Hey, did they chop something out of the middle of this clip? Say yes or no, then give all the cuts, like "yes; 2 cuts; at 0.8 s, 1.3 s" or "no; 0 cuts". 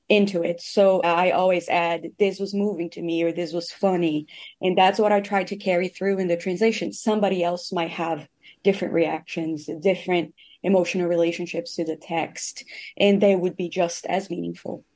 yes; 1 cut; at 1.0 s